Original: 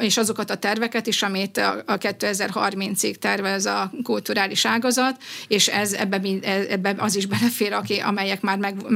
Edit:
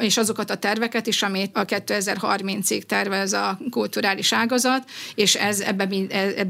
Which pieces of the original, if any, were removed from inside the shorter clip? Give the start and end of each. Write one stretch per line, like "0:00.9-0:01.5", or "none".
0:01.5-0:01.9